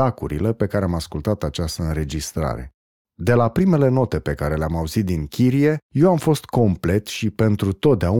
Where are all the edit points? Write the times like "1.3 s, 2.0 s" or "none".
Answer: 3.0 s